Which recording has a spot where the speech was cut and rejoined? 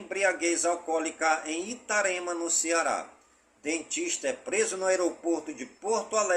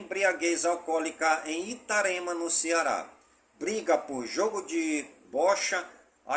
second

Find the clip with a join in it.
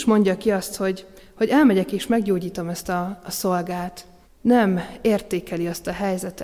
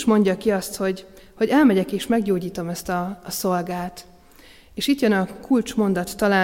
first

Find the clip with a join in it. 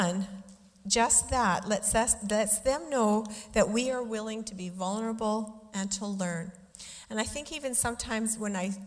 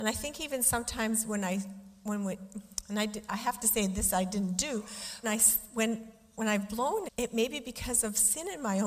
second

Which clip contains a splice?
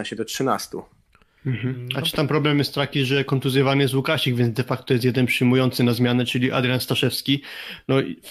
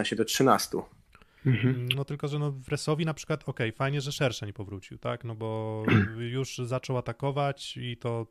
second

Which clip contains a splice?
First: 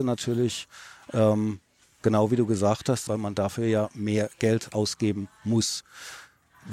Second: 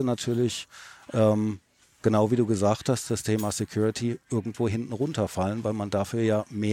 first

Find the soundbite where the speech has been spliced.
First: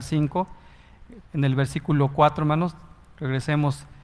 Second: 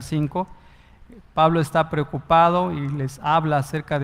first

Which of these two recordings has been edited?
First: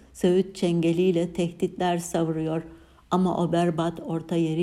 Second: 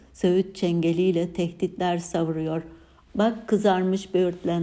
second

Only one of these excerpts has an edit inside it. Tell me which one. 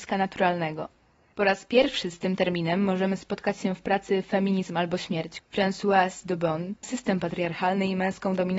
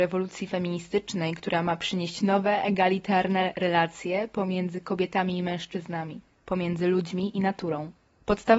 first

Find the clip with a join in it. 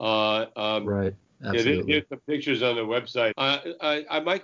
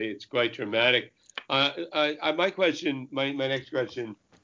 first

